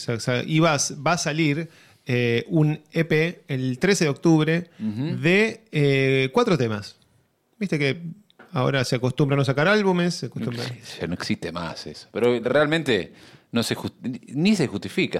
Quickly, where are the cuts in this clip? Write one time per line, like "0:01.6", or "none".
none

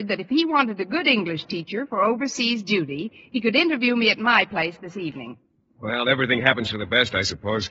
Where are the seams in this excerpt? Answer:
none

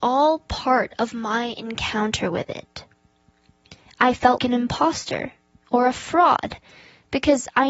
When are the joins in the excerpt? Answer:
0:04.4

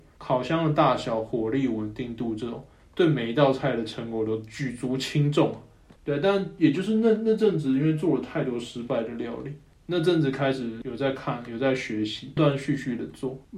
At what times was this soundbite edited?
0:12.4

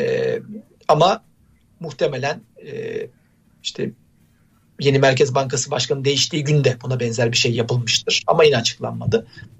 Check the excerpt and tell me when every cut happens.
none

